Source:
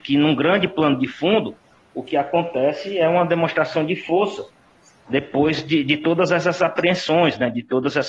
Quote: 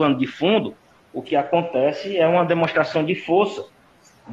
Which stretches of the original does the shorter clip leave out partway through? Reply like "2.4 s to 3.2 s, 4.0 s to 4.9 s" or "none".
none